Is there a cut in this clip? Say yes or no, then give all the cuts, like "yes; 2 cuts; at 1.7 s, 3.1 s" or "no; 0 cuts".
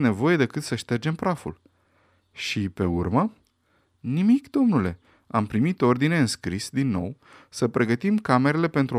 no; 0 cuts